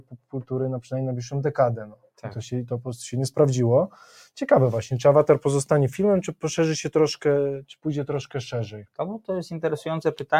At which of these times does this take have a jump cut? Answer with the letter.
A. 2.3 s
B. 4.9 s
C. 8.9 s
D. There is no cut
D